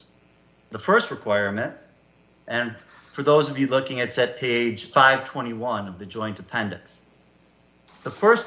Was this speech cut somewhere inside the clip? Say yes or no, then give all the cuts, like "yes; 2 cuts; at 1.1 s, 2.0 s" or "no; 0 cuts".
yes; 1 cut; at 4.9 s